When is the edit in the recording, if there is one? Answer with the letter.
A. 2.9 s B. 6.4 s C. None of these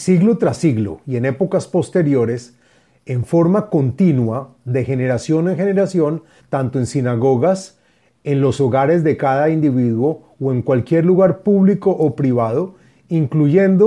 B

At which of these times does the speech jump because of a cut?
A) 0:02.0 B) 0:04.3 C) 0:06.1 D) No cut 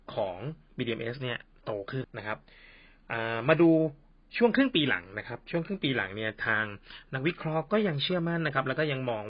A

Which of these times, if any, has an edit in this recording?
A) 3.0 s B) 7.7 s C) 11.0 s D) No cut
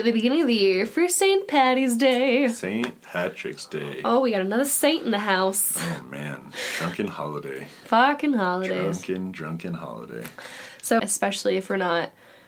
C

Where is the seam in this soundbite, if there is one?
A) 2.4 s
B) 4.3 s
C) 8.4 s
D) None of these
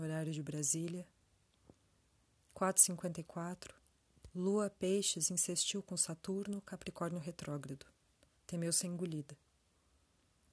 C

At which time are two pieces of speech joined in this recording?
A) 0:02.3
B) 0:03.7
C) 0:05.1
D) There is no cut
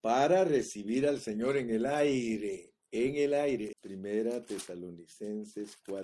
B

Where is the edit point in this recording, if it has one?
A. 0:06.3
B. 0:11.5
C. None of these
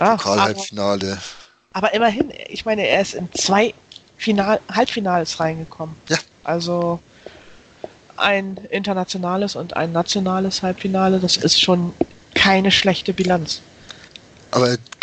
A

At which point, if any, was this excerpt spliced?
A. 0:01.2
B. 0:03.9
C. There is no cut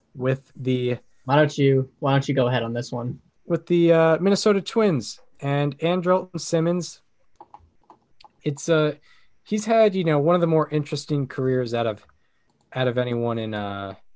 C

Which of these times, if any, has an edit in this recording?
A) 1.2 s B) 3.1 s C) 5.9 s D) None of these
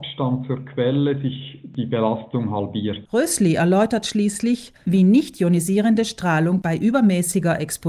B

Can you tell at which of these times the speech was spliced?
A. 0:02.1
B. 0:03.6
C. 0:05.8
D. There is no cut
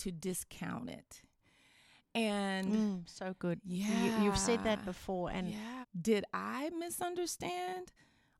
C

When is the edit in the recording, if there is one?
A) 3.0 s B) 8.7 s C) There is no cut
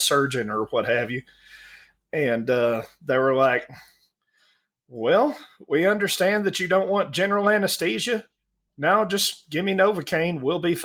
B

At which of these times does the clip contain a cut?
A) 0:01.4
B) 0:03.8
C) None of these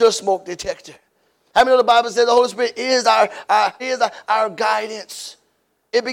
B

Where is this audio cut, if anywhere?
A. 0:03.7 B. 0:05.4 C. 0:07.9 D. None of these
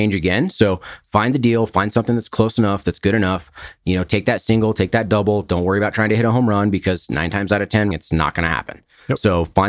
C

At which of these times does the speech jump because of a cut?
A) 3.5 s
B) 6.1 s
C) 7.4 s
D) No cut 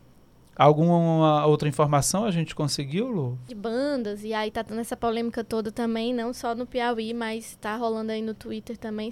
A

